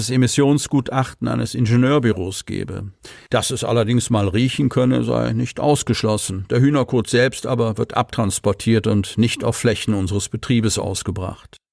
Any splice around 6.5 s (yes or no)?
no